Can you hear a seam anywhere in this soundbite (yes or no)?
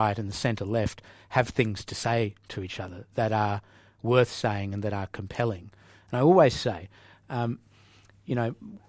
no